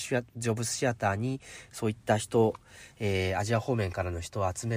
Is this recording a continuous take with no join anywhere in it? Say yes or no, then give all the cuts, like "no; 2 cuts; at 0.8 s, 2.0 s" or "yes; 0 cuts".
yes; 0 cuts